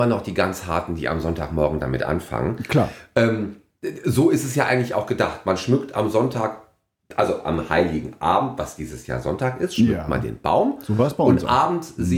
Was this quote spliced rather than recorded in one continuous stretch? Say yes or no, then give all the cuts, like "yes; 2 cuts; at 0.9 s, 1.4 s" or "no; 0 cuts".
no; 0 cuts